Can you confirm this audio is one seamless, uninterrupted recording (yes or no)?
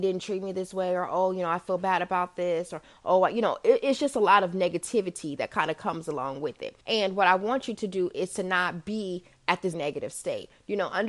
no